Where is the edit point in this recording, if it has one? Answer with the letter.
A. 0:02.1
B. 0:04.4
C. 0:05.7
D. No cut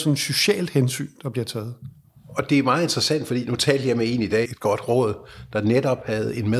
B